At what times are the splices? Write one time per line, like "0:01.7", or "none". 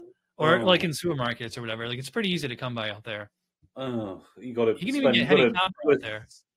none